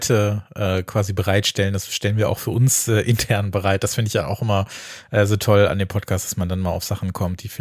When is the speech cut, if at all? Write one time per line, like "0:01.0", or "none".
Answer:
none